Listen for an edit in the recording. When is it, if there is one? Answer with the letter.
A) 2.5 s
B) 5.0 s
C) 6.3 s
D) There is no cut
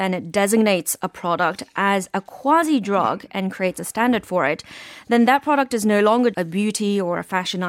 C